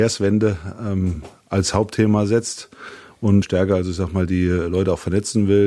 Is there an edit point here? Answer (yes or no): yes